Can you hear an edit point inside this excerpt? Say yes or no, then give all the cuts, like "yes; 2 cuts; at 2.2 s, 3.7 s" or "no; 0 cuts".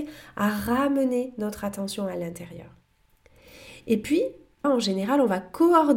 yes; 1 cut; at 4.6 s